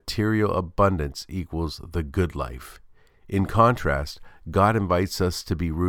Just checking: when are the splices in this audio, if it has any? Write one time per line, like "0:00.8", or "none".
none